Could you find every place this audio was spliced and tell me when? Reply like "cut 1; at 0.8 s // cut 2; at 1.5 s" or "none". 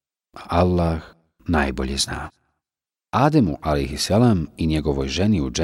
cut 1; at 3.0 s